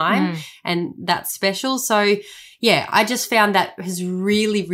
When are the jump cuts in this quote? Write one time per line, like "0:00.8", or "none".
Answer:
none